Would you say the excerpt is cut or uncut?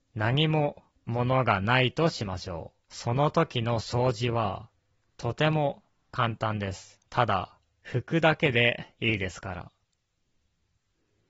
cut